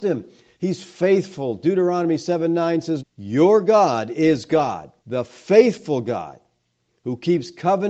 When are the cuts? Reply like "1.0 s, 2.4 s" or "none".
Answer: 3.0 s, 5.0 s